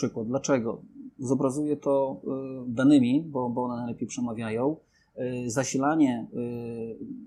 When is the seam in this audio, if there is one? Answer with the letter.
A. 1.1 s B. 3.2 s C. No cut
C